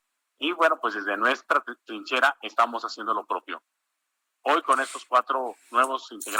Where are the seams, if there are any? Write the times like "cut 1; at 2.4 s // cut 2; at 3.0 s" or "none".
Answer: none